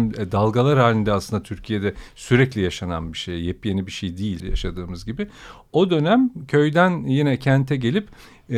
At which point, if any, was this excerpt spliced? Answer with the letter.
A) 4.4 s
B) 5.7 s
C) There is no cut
A